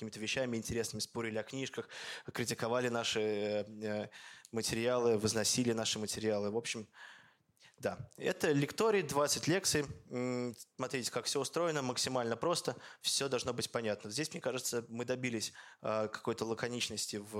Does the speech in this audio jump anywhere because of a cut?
no; 0 cuts

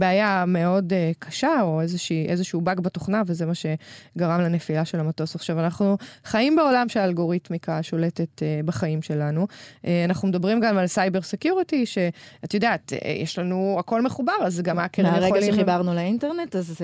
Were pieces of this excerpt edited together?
no; 0 cuts

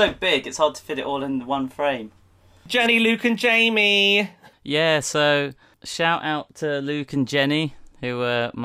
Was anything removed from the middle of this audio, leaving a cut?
no; 0 cuts

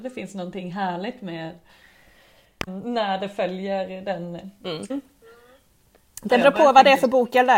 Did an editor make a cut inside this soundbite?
yes; 2 cuts; at 2.7 s, 4.9 s

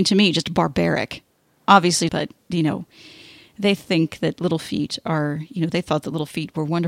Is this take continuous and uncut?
no; 1 cut; at 2.1 s

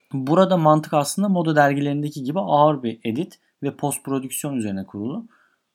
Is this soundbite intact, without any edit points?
yes; 0 cuts

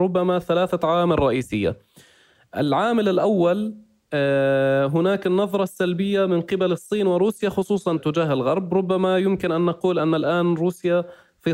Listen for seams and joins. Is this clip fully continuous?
no; 1 cut; at 8.0 s

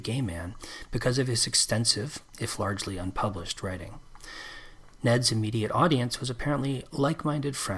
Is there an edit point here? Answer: no; 0 cuts

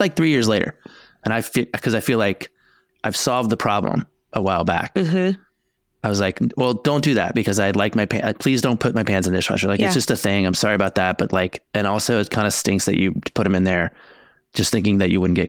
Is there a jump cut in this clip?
no; 0 cuts

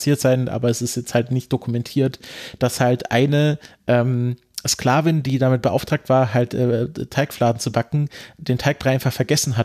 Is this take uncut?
yes; 0 cuts

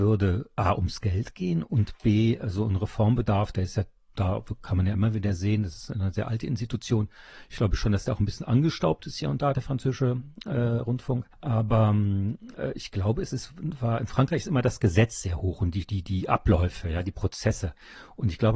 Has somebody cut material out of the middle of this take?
yes; 1 cut; at 11.3 s

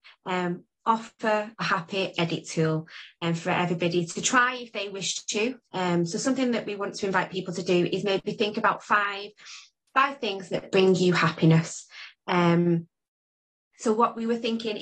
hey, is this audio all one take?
no; 1 cut; at 5.7 s

